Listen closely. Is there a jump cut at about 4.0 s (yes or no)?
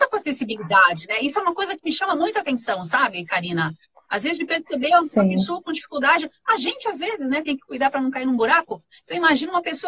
no